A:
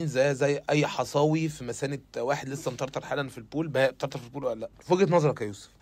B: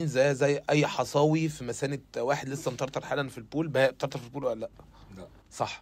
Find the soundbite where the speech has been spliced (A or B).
A